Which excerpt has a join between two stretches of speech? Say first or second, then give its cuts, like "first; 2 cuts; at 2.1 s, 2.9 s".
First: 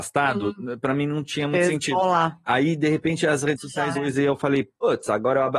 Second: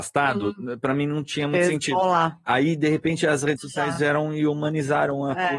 first; 1 cut; at 3.9 s